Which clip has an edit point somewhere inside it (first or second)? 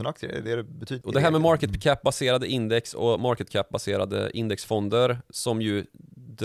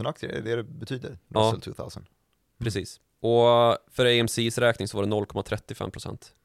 first